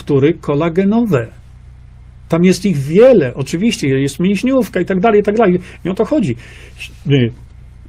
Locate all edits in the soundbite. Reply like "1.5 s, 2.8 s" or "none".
none